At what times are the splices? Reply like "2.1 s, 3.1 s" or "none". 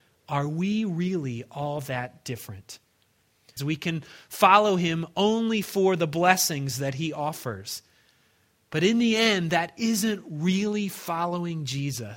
3.6 s